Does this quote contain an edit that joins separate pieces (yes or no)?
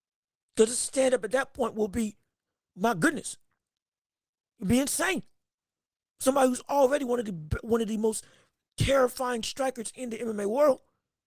no